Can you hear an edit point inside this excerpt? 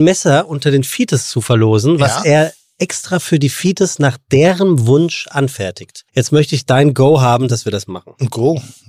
yes; 1 cut; at 6.1 s

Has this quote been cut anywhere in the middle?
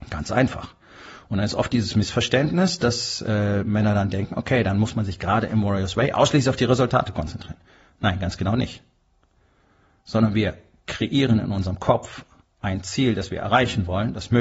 no; 0 cuts

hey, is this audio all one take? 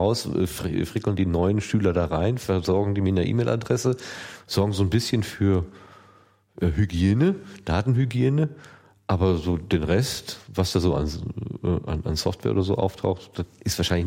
yes; 0 cuts

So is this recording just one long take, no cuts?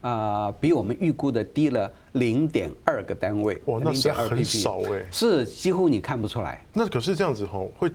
no; 1 cut; at 6.7 s

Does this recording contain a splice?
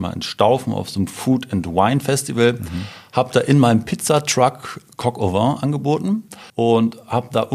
yes; 1 cut; at 6.5 s

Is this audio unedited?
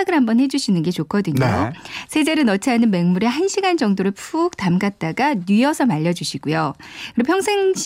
yes; 0 cuts

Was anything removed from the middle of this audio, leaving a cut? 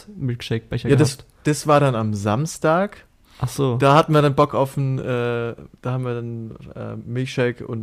no; 0 cuts

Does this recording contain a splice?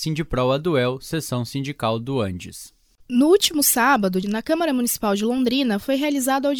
yes; 2 cuts; at 3.0 s, 4.2 s

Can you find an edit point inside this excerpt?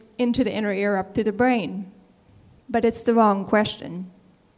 yes; 1 cut; at 2.6 s

